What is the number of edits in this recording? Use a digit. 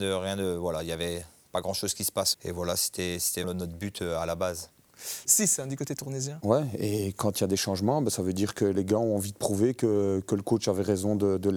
3